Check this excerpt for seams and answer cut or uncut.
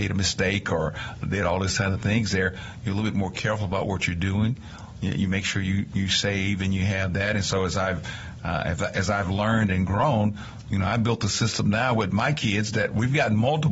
uncut